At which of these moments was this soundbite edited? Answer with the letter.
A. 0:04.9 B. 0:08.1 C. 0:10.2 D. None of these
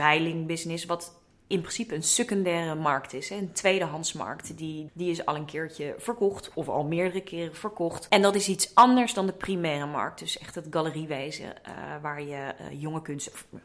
A